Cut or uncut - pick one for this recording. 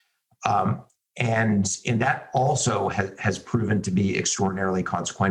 uncut